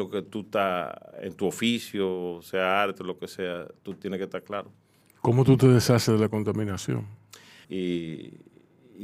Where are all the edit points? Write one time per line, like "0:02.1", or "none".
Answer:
0:05.0
0:07.6